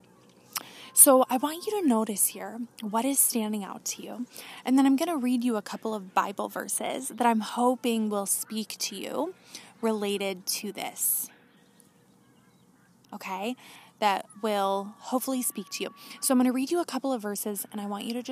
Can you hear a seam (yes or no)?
no